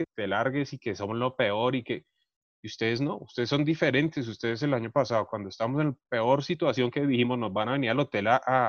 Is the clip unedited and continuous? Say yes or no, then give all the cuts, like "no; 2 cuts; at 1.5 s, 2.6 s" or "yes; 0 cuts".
yes; 0 cuts